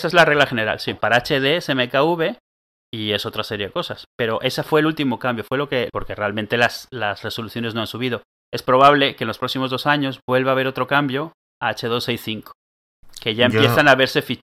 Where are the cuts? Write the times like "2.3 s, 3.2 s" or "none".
1.0 s, 5.9 s